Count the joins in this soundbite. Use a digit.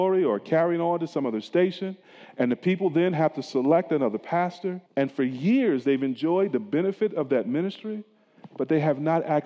1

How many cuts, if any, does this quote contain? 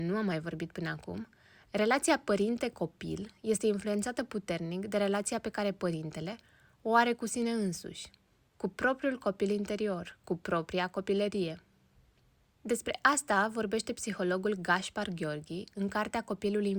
0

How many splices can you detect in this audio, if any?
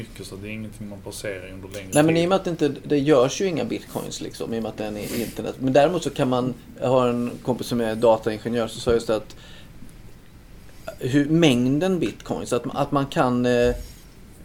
0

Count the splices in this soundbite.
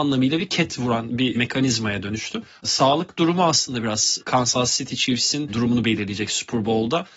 1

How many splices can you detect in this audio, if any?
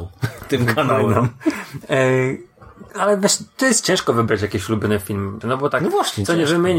2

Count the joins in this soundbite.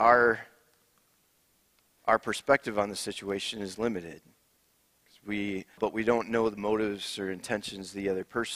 1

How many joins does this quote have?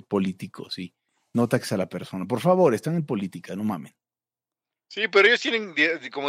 0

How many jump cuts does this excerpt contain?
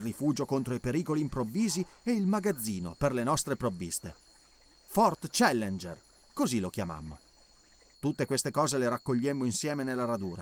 1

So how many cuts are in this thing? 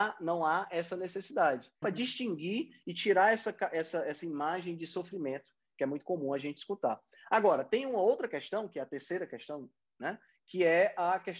1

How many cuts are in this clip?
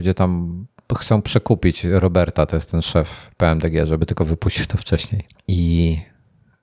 1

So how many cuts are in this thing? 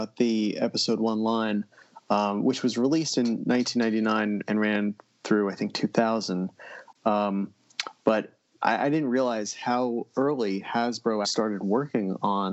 2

